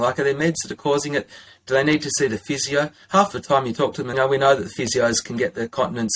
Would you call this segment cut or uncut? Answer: cut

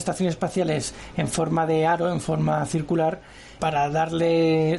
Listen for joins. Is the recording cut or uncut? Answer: cut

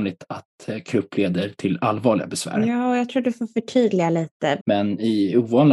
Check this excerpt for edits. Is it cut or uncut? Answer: cut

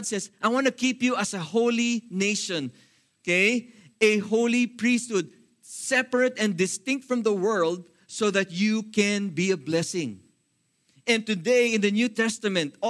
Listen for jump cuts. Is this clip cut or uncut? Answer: uncut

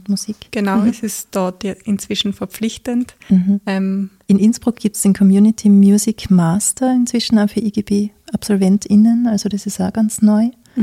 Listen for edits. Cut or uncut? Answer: uncut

